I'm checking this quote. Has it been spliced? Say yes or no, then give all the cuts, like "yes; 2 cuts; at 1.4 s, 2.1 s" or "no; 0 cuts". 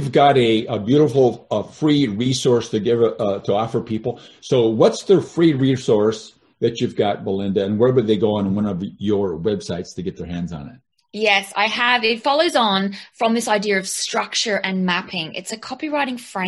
no; 0 cuts